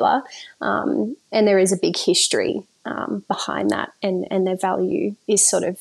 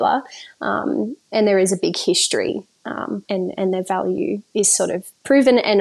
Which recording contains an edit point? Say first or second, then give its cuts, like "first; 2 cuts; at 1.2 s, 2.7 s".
second; 1 cut; at 3.3 s